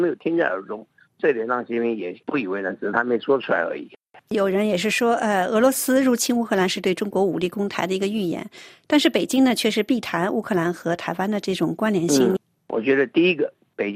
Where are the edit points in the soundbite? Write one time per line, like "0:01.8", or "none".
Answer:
0:12.4